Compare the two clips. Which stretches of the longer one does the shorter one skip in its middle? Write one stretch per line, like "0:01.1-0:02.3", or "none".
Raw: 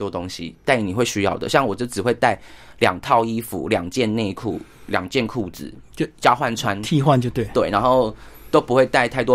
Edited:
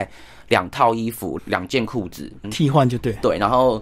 0:03.7-0:04.8
0:05.9-0:06.8